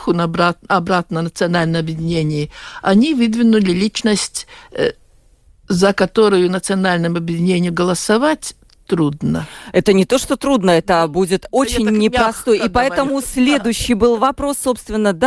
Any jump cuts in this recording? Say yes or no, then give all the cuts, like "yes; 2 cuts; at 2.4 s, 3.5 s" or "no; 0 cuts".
no; 0 cuts